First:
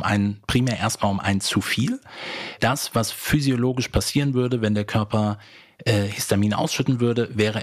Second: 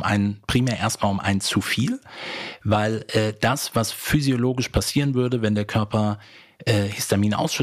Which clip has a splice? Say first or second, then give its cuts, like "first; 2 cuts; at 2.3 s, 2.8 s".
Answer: first; 1 cut; at 2.6 s